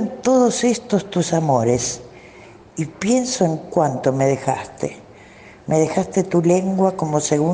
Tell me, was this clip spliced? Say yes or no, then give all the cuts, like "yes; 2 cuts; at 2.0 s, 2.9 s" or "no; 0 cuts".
no; 0 cuts